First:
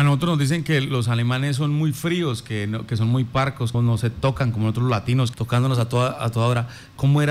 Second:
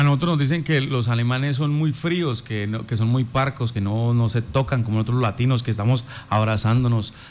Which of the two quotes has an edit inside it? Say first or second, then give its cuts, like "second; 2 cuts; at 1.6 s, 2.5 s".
first; 2 cuts; at 3.7 s, 5.3 s